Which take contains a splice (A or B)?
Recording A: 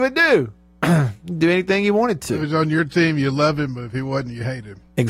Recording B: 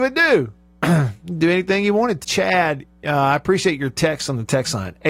B